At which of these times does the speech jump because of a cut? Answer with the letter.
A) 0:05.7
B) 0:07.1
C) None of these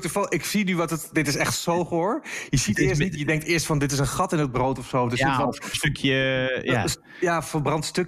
A